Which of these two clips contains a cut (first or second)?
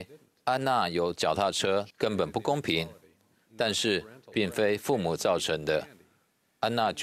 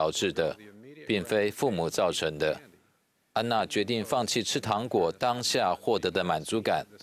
first